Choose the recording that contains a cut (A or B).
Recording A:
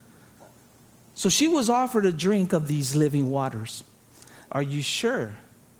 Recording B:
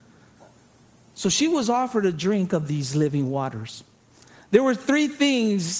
A